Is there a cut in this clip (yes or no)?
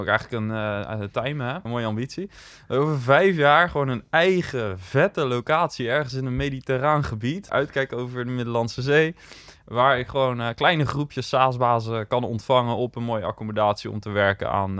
yes